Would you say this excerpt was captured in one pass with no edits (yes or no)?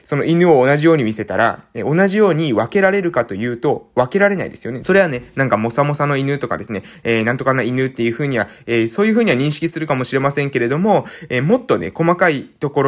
no